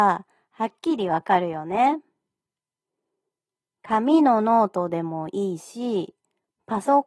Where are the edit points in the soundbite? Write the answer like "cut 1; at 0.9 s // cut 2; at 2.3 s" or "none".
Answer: cut 1; at 3.7 s